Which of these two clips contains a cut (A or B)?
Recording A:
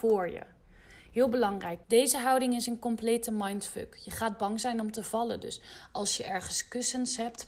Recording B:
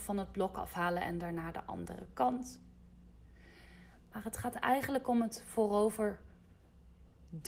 A